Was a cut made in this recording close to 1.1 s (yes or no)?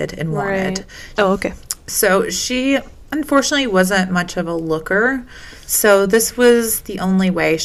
yes